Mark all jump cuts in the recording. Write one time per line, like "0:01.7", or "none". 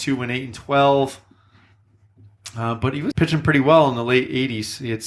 0:03.1